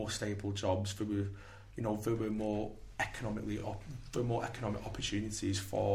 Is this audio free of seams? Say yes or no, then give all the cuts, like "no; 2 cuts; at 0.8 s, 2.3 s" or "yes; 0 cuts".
yes; 0 cuts